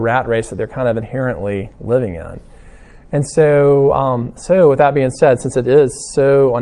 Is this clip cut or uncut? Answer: uncut